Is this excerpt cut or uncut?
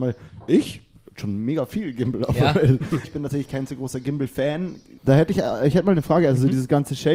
cut